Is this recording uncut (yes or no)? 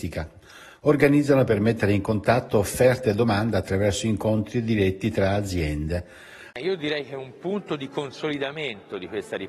no